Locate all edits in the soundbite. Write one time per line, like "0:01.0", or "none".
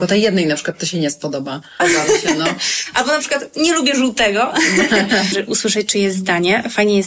0:01.8
0:05.3